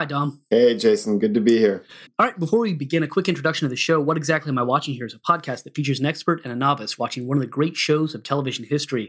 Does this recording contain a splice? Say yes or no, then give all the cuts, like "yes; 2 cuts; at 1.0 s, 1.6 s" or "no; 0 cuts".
yes; 1 cut; at 2.1 s